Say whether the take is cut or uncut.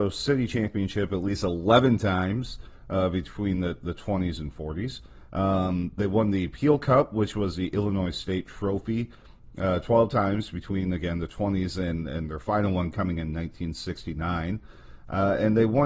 uncut